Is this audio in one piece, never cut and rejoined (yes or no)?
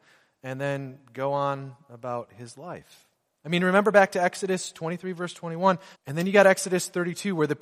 no